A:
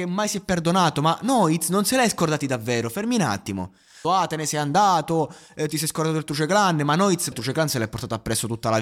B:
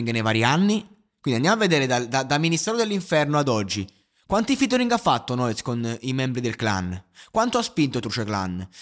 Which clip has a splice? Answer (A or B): A